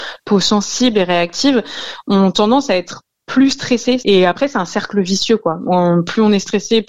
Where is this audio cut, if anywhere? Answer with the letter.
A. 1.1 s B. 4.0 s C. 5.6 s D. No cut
B